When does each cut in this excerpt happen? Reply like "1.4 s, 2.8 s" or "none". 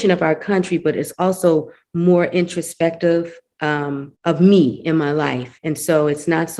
4.1 s, 5.6 s